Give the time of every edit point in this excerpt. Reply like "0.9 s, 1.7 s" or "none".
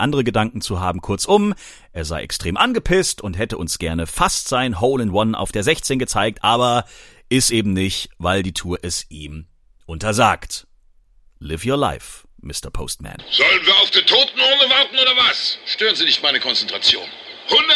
none